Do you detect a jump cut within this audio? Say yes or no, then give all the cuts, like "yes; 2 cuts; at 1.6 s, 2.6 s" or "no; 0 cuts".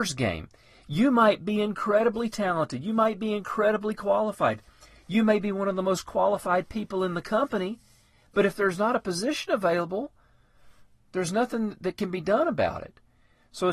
no; 0 cuts